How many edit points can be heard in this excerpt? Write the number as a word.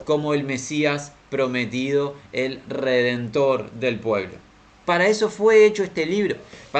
one